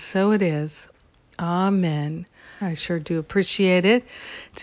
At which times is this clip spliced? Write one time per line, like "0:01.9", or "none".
0:02.6